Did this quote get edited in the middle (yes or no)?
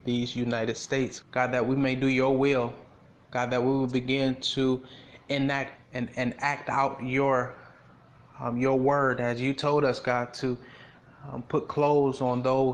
yes